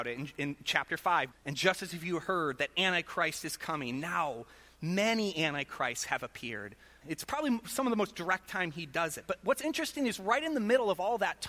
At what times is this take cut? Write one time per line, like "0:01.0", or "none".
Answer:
0:01.3
0:07.0